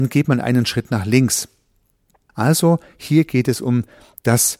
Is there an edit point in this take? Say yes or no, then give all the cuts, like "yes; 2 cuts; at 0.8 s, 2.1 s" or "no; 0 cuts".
yes; 1 cut; at 2.3 s